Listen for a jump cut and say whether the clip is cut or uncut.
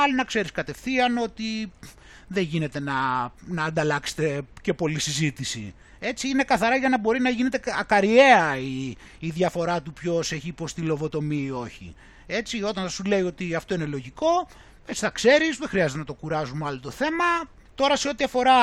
cut